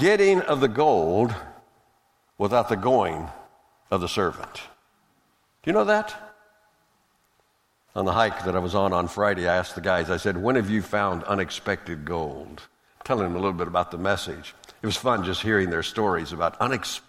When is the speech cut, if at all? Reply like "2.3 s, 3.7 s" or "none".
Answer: none